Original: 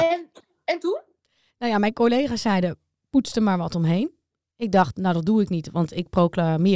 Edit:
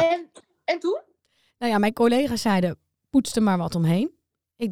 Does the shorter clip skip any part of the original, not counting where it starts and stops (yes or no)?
no